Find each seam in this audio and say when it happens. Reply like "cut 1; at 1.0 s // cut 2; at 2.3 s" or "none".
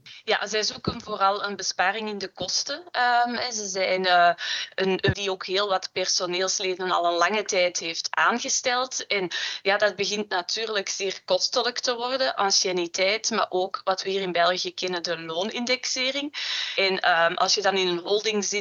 cut 1; at 5.1 s